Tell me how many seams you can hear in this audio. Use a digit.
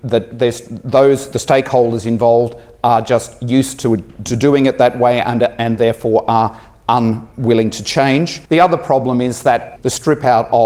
2